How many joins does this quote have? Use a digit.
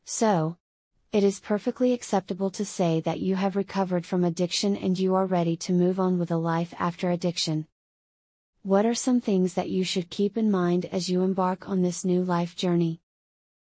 0